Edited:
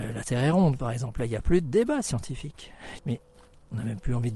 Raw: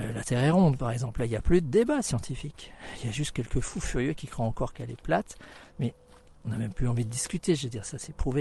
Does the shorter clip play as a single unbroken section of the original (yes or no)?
no